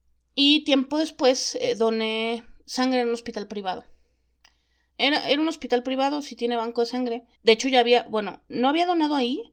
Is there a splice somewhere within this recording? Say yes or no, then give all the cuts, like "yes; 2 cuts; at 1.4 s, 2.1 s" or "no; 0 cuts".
yes; 2 cuts; at 4.9 s, 7.3 s